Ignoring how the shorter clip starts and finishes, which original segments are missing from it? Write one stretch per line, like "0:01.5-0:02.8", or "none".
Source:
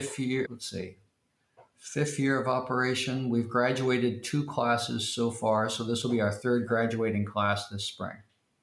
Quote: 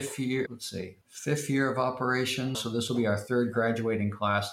0:01.0-0:01.7
0:03.2-0:05.7